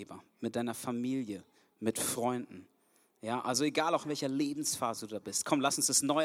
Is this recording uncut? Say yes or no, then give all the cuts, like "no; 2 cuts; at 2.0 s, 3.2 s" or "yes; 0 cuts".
yes; 0 cuts